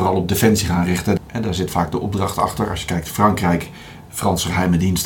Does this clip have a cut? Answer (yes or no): yes